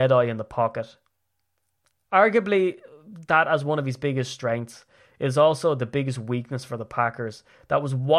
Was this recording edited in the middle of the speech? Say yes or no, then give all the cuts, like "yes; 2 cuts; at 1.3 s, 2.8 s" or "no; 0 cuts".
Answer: no; 0 cuts